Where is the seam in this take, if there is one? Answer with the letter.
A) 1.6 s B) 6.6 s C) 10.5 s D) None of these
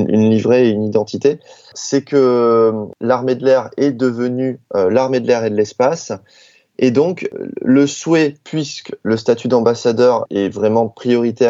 D